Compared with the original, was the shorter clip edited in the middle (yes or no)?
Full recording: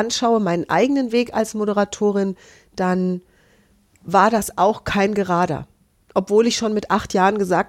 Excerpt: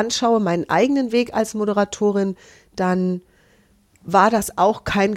no